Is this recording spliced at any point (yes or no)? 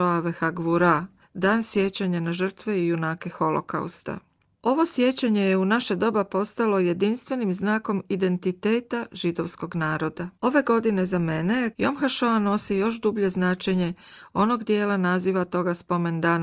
yes